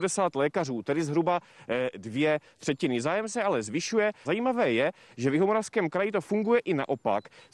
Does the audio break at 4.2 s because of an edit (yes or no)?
yes